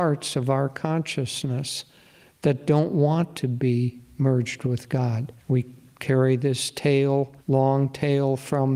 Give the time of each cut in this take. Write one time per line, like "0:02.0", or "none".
0:05.4
0:07.4